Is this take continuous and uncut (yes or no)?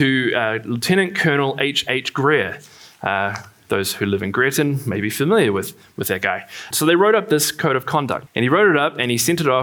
no